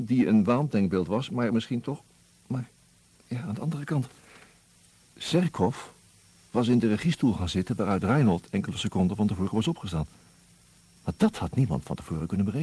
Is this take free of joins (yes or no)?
yes